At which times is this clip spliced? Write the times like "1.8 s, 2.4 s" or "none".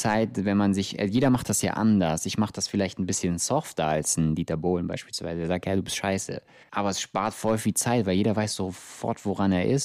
6.6 s